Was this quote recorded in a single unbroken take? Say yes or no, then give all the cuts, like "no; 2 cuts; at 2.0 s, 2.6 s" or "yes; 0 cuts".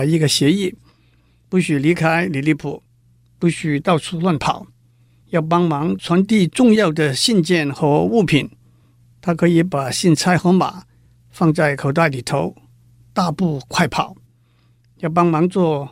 yes; 0 cuts